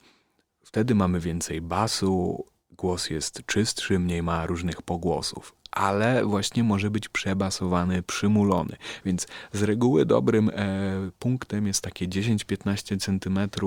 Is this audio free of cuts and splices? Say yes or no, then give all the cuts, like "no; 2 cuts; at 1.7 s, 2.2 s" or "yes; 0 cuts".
yes; 0 cuts